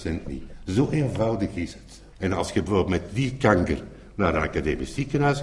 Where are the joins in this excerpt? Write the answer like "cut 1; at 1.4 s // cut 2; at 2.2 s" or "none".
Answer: cut 1; at 2.1 s